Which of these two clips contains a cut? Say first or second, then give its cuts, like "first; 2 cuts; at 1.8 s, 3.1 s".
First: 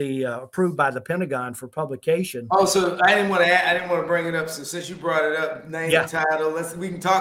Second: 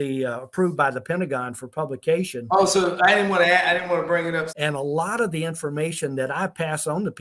second; 1 cut; at 4.5 s